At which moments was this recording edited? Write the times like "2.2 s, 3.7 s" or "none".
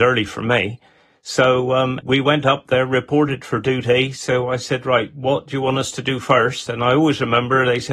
2.0 s